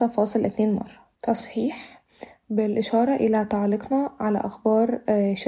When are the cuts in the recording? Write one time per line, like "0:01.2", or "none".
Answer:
0:01.2